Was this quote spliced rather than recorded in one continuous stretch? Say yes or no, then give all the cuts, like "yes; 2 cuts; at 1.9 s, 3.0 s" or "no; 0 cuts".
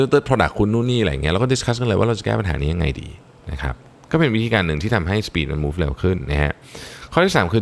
no; 0 cuts